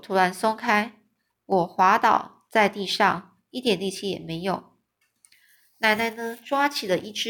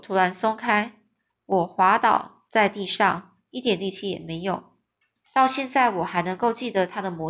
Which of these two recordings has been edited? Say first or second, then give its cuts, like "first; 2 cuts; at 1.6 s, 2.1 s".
second; 1 cut; at 5.3 s